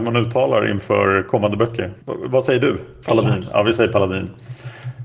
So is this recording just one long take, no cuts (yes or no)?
no